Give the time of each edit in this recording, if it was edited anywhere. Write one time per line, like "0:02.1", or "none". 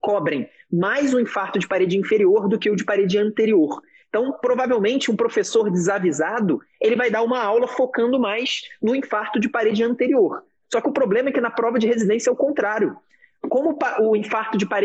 0:04.0